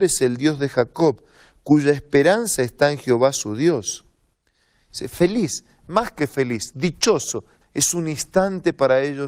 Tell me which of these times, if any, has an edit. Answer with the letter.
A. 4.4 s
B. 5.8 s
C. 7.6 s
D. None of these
C